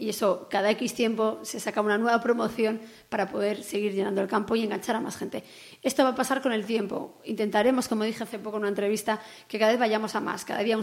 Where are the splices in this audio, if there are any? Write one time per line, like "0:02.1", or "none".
none